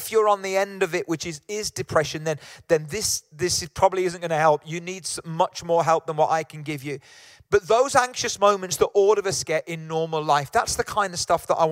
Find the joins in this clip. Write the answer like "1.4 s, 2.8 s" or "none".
none

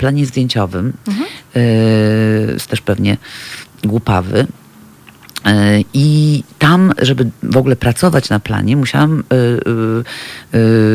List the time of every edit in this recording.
2.6 s

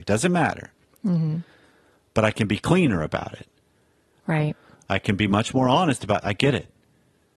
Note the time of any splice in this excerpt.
4.2 s, 6.2 s

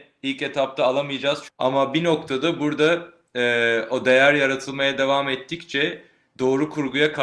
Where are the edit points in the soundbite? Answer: 1.5 s

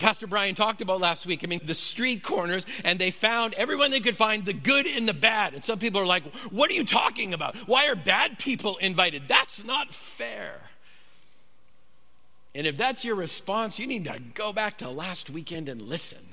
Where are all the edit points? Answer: 1.6 s

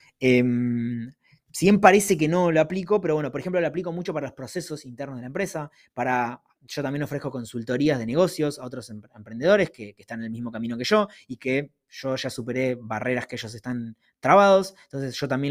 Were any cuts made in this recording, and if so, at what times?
none

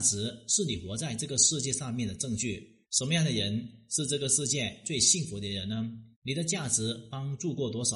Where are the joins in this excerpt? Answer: 2.8 s, 6.1 s

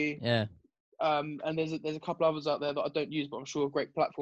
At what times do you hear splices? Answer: none

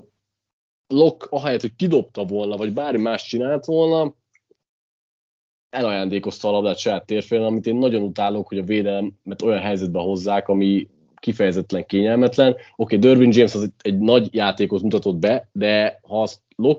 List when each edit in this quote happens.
none

